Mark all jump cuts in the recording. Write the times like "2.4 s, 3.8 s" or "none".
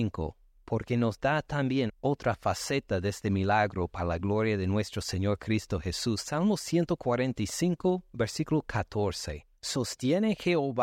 1.9 s